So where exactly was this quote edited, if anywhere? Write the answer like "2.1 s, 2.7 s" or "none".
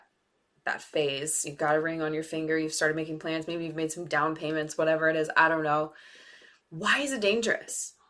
none

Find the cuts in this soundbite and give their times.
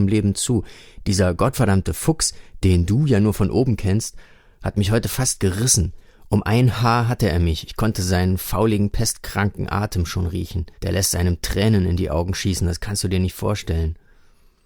10.7 s

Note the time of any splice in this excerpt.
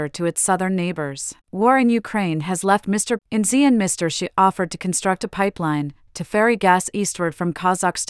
1.4 s, 3.2 s, 6.1 s

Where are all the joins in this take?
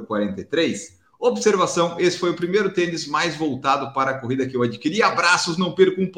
none

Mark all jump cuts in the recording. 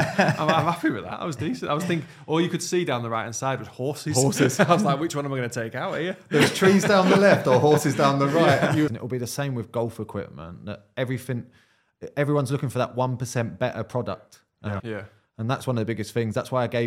8.9 s, 14.8 s

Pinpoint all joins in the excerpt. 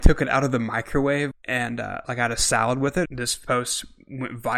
1.3 s, 3.0 s

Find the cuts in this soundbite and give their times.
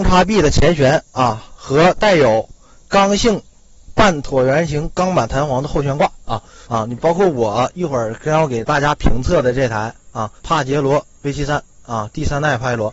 6.6 s, 10.4 s

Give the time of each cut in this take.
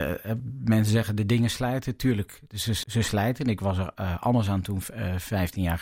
2.8 s

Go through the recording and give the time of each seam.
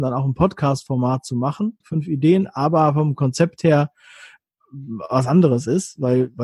1.8 s

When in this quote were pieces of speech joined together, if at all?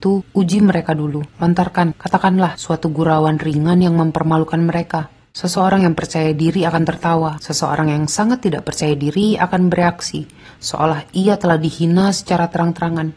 none

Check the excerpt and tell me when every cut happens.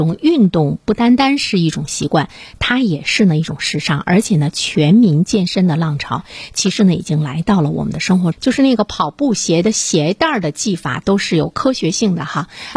8.3 s

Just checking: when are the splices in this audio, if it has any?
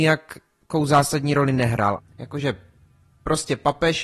2.0 s

